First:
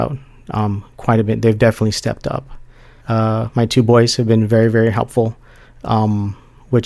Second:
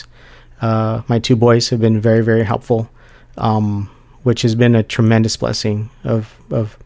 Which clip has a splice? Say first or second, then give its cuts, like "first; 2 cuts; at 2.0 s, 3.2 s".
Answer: first; 1 cut; at 3.0 s